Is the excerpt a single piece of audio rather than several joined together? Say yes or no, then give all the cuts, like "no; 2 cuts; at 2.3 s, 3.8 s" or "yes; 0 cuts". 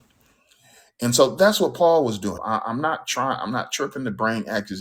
no; 1 cut; at 2.4 s